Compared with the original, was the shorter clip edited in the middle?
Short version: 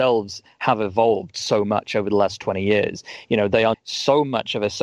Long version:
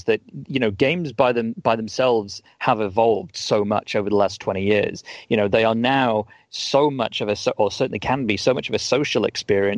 yes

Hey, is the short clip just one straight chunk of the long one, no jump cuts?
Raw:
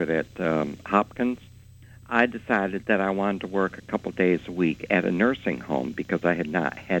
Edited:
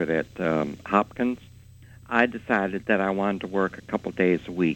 yes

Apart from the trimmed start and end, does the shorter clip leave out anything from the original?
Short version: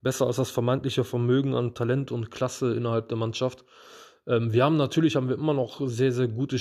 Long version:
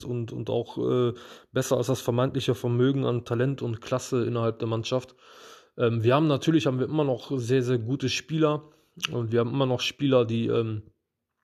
no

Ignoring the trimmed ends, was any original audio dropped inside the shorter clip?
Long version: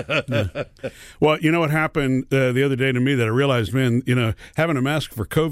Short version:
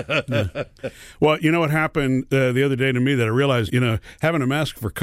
yes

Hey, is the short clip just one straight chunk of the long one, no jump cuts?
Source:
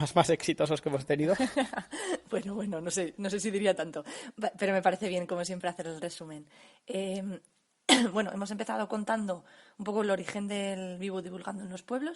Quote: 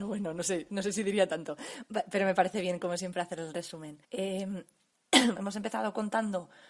no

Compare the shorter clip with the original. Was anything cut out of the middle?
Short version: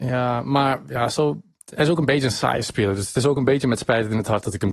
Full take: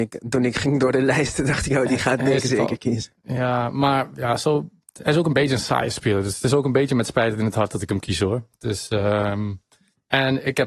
no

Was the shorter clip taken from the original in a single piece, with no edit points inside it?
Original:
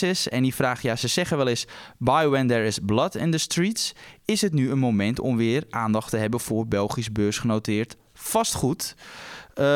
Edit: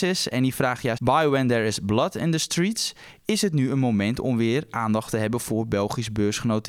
no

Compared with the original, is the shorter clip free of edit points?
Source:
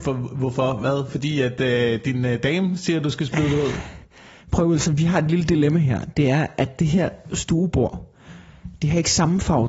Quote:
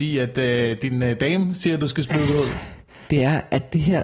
no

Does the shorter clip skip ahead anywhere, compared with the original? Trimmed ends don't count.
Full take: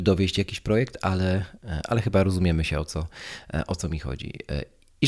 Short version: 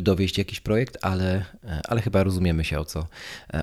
no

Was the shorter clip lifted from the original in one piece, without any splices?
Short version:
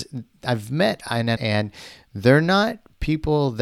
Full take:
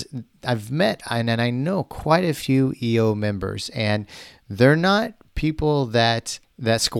no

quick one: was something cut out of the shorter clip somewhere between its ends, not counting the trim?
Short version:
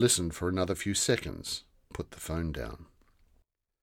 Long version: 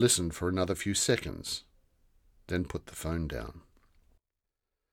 yes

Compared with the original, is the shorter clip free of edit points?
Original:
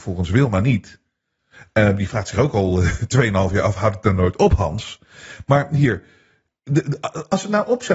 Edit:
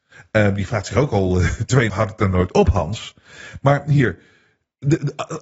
no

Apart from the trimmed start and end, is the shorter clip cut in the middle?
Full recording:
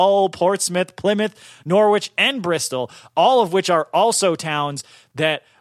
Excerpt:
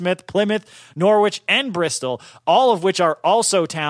no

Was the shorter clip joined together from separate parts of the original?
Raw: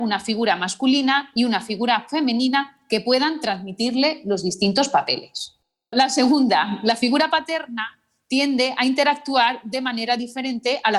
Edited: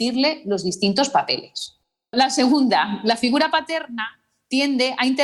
no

